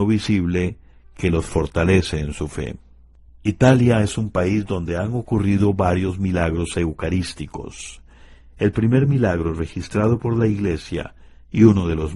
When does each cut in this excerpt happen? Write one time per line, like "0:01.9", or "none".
none